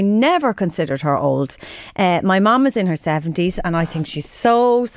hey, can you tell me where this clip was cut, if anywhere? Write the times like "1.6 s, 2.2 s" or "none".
none